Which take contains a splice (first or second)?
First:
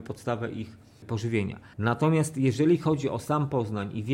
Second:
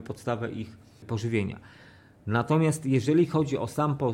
first